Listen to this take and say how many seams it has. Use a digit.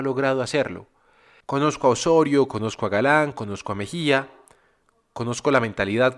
1